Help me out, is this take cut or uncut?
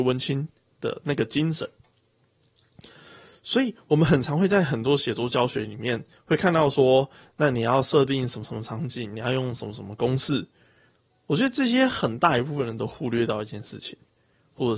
uncut